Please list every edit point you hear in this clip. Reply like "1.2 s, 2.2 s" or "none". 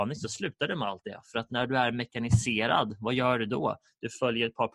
none